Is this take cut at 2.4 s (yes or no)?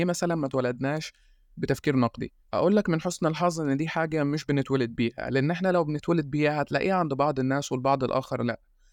yes